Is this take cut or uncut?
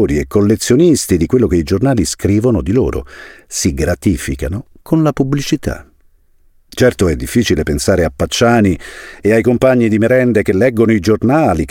uncut